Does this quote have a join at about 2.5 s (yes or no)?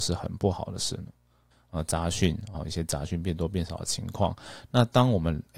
yes